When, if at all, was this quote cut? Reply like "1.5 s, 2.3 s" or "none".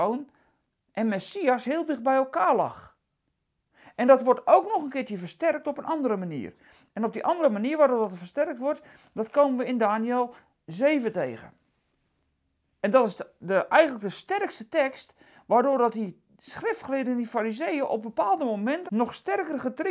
18.9 s